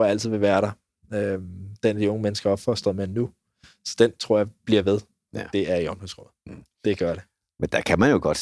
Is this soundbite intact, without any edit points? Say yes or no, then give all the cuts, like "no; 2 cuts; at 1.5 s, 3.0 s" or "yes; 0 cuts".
no; 1 cut; at 5.3 s